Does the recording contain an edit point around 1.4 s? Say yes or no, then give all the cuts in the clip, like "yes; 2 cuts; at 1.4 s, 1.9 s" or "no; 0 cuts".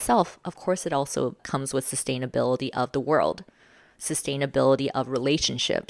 yes; 1 cut; at 1.4 s